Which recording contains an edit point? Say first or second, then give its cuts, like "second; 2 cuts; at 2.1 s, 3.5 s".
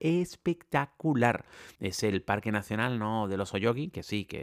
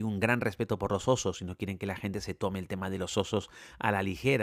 first; 1 cut; at 1.8 s